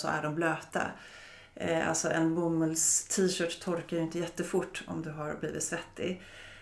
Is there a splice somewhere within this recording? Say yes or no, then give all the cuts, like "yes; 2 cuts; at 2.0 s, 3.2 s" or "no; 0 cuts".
no; 0 cuts